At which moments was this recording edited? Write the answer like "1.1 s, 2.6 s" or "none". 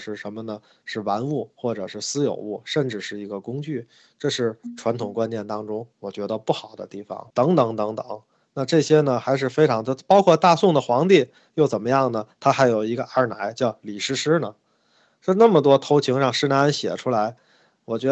7.3 s